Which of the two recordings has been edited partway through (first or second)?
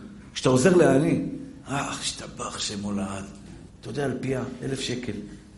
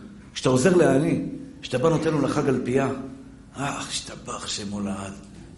first